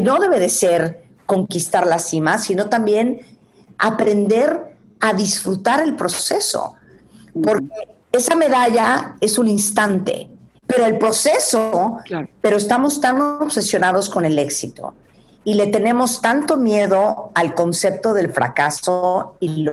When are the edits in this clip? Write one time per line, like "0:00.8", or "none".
0:08.0
0:10.6
0:12.2